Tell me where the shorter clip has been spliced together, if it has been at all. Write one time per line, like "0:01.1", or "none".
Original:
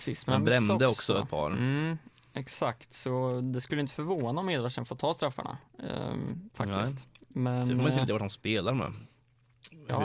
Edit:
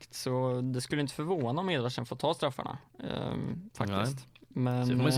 none